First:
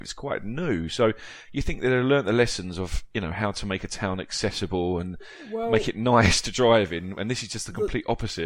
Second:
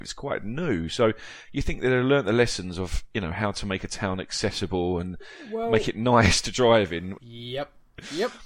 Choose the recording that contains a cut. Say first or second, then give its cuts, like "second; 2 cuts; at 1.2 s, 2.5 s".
second; 1 cut; at 7.2 s